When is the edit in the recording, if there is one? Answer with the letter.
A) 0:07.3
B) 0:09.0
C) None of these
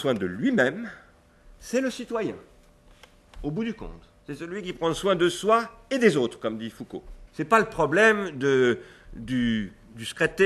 A